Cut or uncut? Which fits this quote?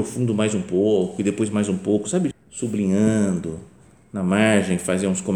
cut